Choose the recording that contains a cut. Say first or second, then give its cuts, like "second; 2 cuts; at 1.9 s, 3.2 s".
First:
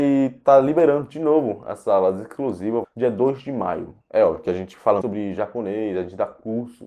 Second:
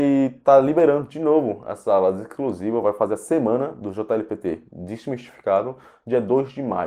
first; 3 cuts; at 2.8 s, 4.0 s, 5.0 s